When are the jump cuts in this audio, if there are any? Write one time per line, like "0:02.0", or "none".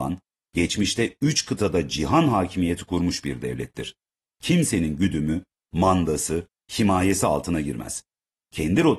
none

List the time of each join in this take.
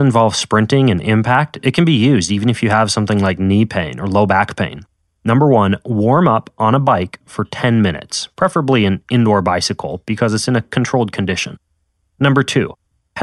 0:05.1

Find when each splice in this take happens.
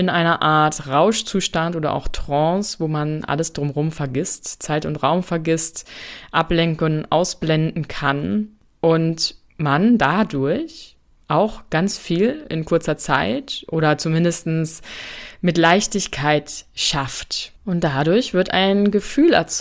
0:17.6

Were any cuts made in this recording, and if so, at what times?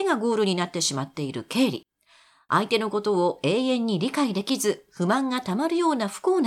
none

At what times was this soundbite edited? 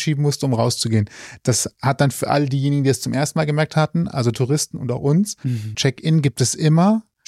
0:05.7

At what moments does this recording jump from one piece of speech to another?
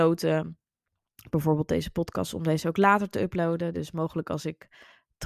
none

